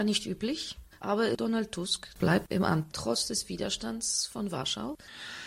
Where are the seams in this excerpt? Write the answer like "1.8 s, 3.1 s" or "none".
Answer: 0.9 s